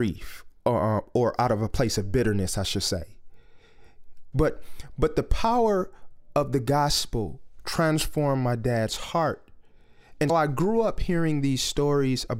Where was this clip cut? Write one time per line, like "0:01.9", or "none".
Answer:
0:04.3
0:10.3

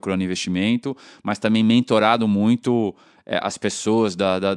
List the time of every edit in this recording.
none

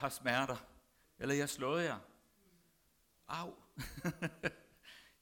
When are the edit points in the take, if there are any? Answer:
0:01.0

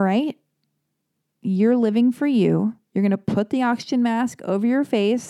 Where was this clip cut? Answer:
none

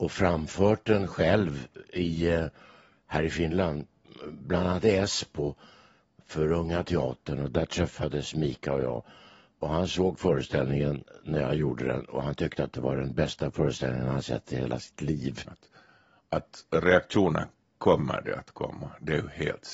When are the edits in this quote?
0:15.4

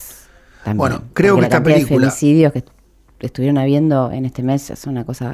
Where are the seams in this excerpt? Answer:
none

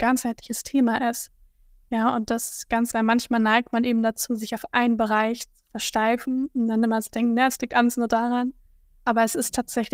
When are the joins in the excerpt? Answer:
0:02.9

